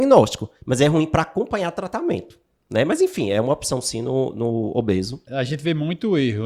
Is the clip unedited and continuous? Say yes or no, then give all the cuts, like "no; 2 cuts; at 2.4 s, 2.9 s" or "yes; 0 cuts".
no; 1 cut; at 5.3 s